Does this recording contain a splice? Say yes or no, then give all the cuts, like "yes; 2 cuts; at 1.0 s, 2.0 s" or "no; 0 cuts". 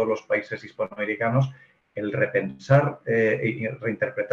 no; 0 cuts